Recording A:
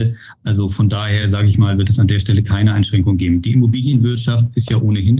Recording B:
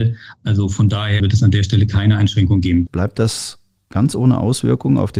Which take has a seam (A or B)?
B